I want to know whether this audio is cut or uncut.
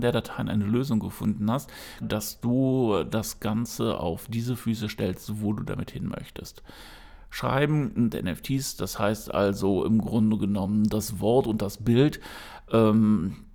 cut